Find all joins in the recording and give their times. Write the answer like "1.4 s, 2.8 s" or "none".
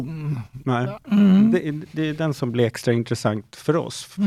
1.0 s